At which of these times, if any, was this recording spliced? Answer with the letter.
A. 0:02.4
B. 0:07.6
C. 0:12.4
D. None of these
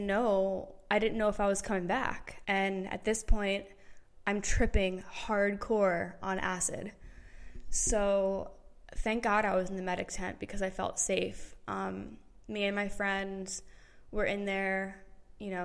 A